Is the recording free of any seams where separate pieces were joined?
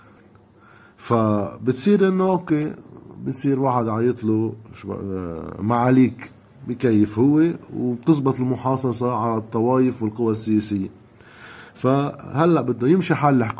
yes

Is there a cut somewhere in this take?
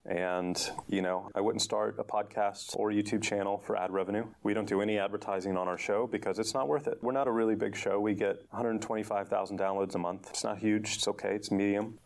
no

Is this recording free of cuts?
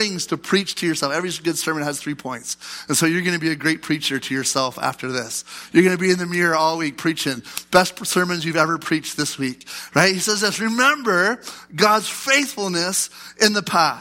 yes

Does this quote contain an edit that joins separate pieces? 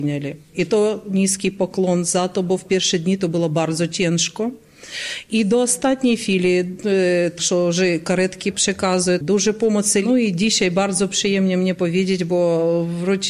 yes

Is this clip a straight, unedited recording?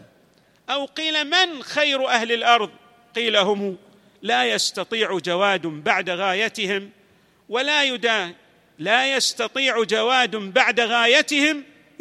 yes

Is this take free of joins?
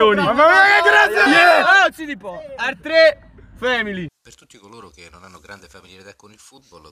no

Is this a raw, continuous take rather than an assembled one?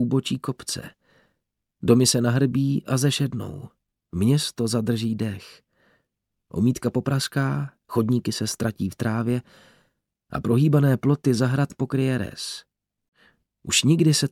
yes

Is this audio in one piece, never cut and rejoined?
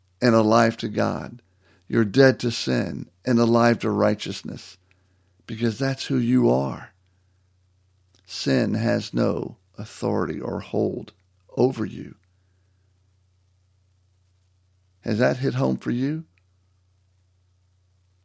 yes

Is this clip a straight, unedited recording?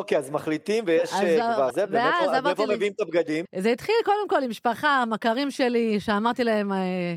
no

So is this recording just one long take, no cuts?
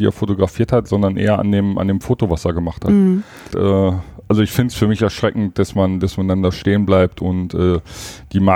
no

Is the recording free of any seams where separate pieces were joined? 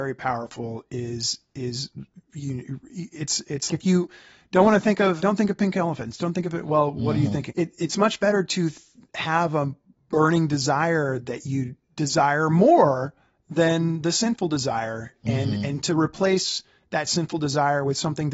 no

